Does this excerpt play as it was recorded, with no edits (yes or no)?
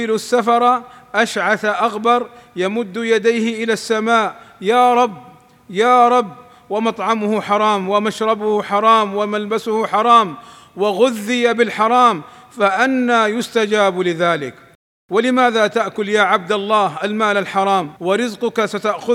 no